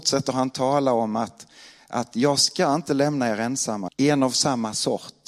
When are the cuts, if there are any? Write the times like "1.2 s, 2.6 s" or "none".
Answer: 3.9 s